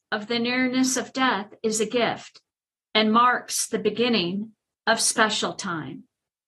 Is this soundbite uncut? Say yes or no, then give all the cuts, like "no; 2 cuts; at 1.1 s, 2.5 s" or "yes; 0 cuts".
yes; 0 cuts